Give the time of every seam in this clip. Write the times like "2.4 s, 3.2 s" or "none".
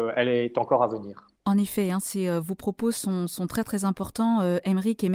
1.4 s